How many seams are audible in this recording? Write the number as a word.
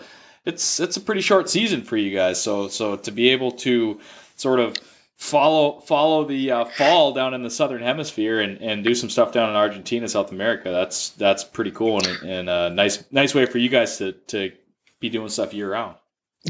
zero